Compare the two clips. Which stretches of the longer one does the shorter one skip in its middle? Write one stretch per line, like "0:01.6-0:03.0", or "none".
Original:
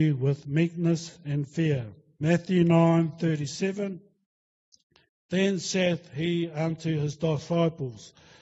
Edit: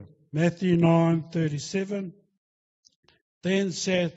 none